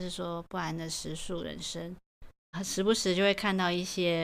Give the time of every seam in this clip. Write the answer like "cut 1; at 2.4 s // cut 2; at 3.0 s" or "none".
cut 1; at 2.5 s

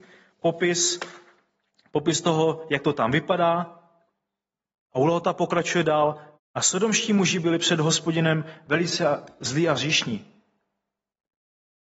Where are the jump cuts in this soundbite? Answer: cut 1; at 6.3 s

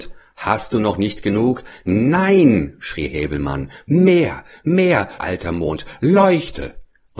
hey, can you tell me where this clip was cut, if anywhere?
cut 1; at 5.2 s

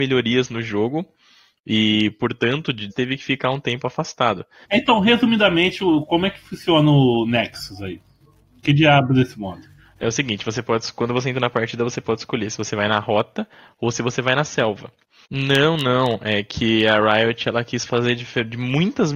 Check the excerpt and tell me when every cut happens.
cut 1; at 2.9 s // cut 2; at 4.6 s // cut 3; at 15.2 s

